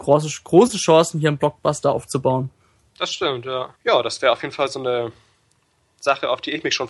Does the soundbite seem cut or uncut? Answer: cut